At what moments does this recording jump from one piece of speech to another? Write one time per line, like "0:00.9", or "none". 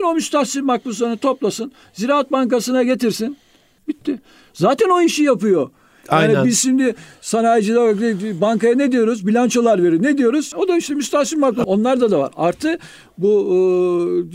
0:03.8
0:10.5
0:11.6